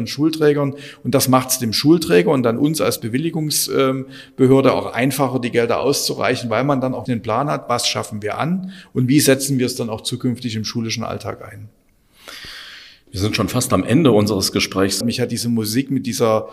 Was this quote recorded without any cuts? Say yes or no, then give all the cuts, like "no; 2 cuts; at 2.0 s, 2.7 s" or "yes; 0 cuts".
no; 2 cuts; at 7.1 s, 15.0 s